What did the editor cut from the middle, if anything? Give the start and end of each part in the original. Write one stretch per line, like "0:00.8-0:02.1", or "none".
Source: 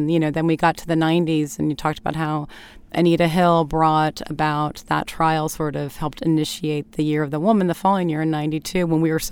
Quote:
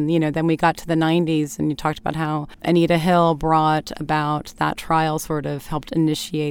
0:02.5-0:02.8